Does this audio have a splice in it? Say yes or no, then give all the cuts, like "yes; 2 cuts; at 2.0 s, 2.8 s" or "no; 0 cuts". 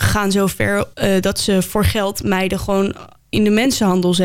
yes; 1 cut; at 0.9 s